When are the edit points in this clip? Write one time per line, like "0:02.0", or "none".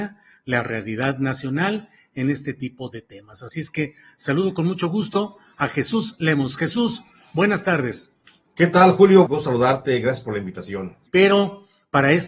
0:09.3
0:11.1

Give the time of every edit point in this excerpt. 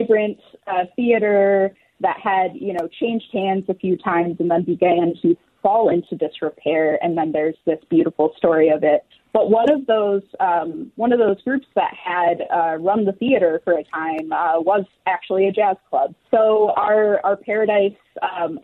0:09.1
0:16.2

